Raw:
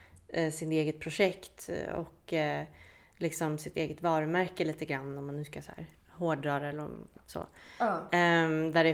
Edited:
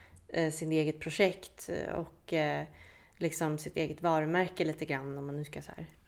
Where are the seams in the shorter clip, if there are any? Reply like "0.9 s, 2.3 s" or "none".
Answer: none